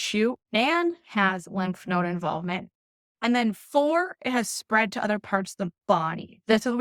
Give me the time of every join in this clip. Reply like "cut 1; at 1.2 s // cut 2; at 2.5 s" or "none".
none